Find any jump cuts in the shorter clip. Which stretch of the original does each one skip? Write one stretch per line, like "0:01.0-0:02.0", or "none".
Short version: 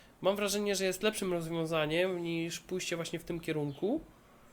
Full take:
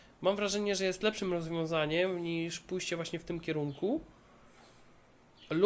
none